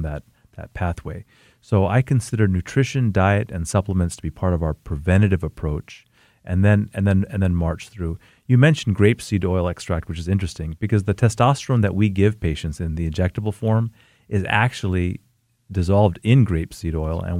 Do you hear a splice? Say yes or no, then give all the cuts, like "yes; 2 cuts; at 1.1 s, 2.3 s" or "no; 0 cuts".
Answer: no; 0 cuts